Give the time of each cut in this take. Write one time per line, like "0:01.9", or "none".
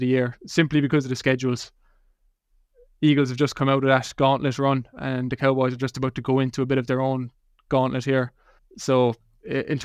0:08.6